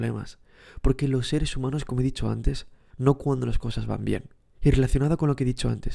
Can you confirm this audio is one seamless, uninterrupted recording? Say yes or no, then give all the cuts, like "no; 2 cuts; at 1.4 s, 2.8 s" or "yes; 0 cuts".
no; 1 cut; at 2.9 s